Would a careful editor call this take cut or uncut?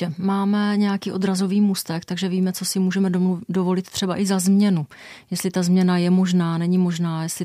uncut